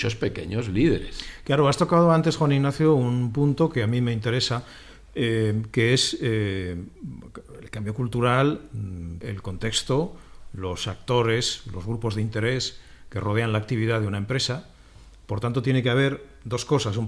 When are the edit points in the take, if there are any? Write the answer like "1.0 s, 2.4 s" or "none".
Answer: 9.2 s